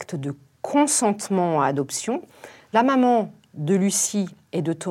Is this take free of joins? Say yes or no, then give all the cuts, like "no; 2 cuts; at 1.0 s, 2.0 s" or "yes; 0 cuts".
yes; 0 cuts